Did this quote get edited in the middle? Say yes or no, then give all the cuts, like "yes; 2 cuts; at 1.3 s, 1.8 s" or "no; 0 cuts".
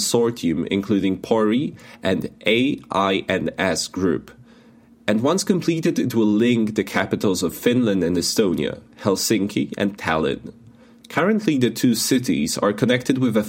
no; 0 cuts